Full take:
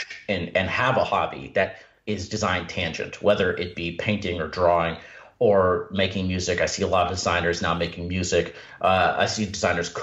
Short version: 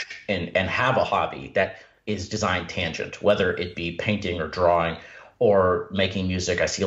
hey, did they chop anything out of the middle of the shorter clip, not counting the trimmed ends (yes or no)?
no